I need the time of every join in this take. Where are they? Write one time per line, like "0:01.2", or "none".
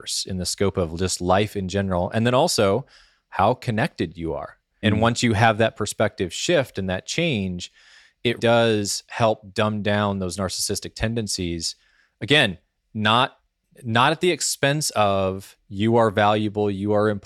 0:04.8
0:08.4